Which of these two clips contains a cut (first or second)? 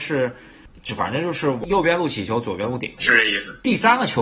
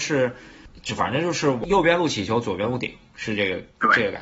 first